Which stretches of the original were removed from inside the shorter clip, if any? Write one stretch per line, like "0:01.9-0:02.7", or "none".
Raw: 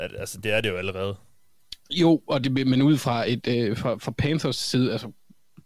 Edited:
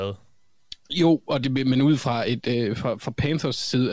none